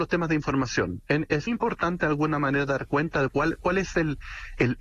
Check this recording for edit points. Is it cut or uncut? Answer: cut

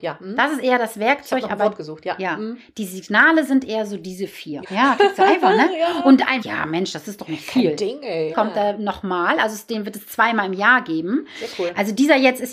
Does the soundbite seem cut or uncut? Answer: cut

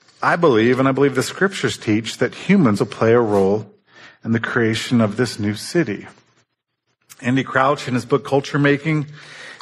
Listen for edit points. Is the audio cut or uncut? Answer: cut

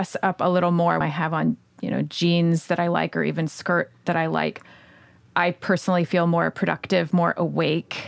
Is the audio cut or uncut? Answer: cut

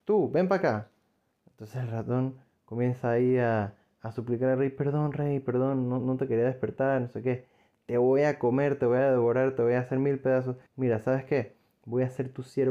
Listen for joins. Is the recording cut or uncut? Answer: cut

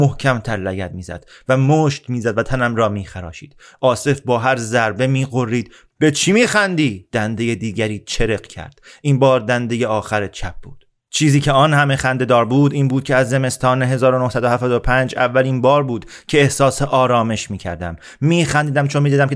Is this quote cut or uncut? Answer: cut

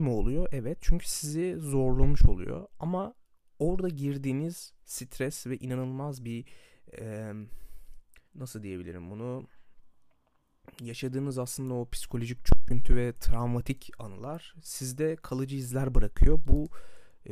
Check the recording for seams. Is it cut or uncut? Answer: cut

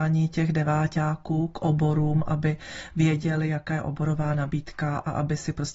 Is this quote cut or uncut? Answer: uncut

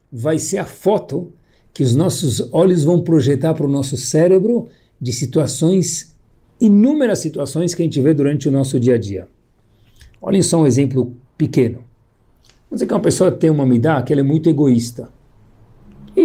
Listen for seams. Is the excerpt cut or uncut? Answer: uncut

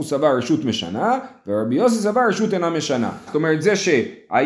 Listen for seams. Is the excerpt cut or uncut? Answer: cut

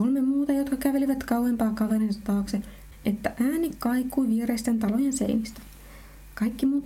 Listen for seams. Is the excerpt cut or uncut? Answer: cut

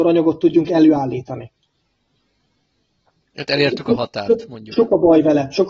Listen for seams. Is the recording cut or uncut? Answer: cut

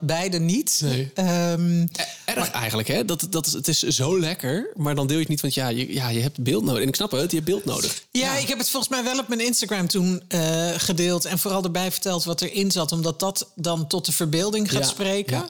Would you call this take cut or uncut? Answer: uncut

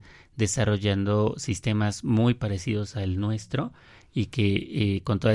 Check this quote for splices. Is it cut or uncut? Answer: uncut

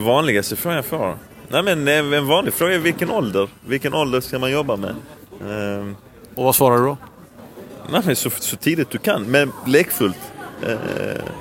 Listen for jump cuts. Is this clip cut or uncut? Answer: uncut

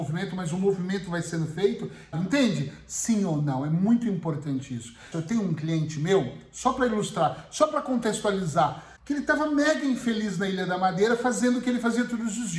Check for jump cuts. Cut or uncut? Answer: cut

